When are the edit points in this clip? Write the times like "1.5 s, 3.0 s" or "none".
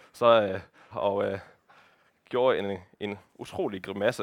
0.9 s